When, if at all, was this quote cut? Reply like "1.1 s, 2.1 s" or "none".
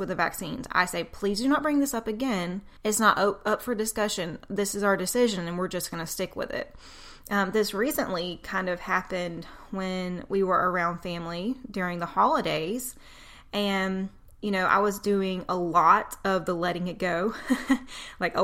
2.8 s